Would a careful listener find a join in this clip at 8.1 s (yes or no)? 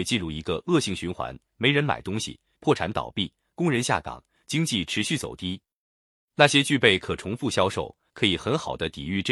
yes